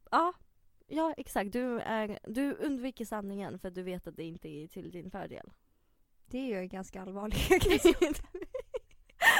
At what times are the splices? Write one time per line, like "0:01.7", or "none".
none